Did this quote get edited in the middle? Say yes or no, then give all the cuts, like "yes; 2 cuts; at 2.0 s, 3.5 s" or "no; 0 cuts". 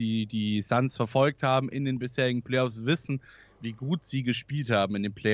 no; 0 cuts